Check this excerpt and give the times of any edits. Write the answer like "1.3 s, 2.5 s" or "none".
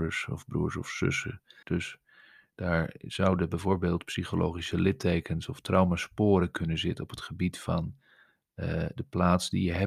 1.6 s